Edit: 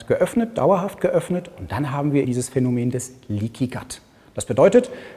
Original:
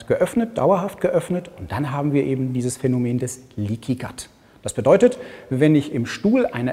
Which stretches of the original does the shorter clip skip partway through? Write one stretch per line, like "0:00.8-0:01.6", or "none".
0:02.2-0:02.5